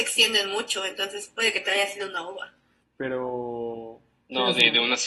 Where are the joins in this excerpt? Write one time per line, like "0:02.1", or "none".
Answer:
0:02.8